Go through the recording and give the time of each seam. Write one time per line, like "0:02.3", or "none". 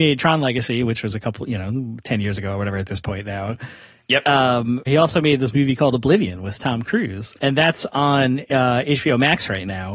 0:04.9